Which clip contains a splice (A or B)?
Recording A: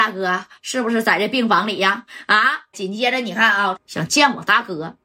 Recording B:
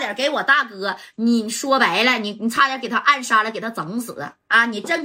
A